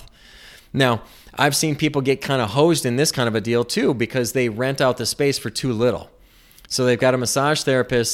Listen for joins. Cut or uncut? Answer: uncut